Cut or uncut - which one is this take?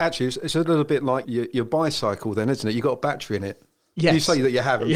cut